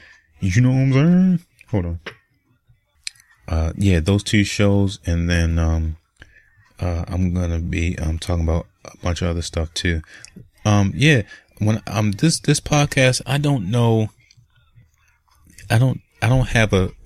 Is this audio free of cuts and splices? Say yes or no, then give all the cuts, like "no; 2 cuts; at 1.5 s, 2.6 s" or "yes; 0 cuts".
no; 1 cut; at 13.2 s